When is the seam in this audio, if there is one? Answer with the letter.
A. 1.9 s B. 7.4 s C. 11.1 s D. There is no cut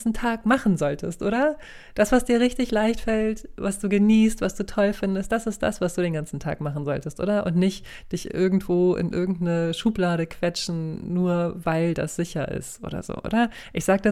D